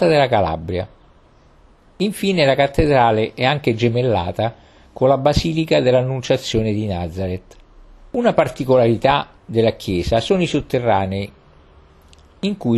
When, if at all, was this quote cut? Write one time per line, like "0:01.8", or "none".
0:08.1
0:09.4